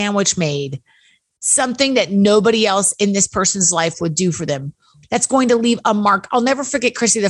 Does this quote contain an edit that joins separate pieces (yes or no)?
yes